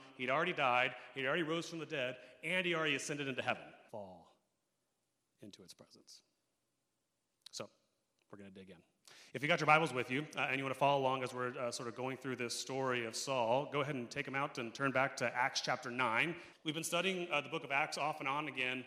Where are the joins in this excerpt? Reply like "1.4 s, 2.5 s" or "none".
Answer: 3.9 s, 16.5 s